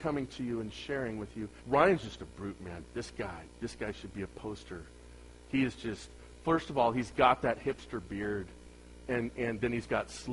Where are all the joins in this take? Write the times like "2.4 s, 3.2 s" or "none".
1.6 s

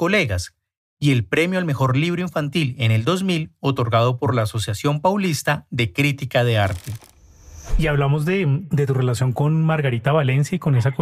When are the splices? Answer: none

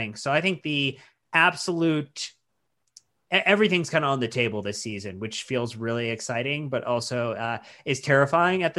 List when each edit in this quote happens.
none

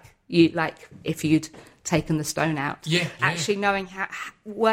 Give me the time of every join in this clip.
3.2 s

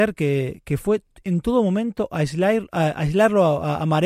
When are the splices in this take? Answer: none

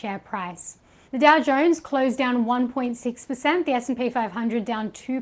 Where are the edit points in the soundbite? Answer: 1.0 s

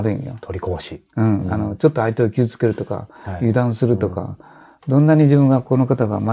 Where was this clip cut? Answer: none

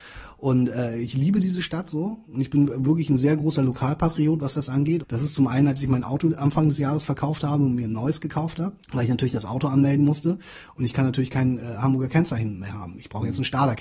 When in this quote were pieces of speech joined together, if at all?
5.0 s, 8.8 s

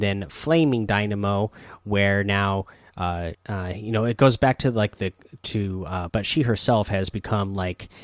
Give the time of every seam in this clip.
3.3 s, 6.1 s

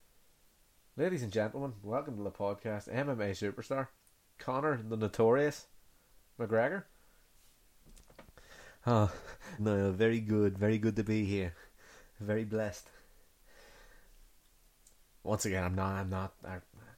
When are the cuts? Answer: 9.6 s

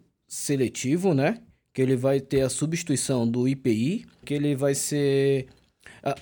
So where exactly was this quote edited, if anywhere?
4.2 s

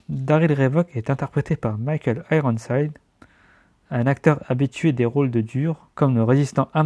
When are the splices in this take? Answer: 5.9 s

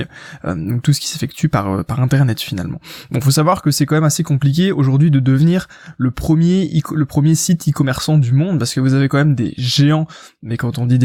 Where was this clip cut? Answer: none

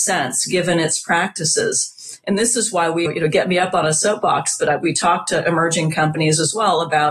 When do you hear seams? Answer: 3.1 s

